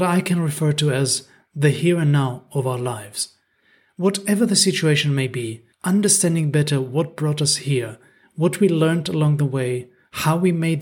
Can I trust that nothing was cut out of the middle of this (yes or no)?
no